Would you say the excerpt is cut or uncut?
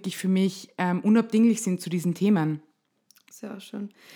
uncut